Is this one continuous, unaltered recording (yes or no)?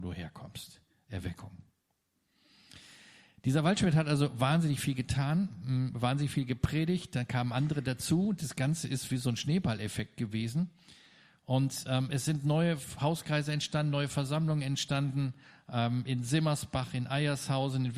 yes